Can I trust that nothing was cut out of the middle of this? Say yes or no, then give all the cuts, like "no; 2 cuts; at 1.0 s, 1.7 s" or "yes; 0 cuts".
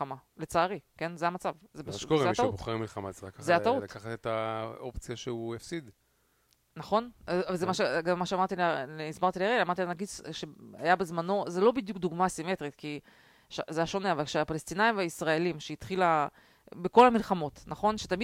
yes; 0 cuts